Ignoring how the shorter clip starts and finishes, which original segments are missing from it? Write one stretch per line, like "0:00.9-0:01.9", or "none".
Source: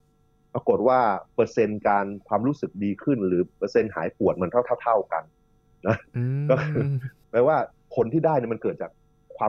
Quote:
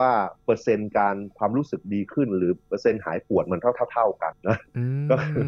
0:05.2-0:05.7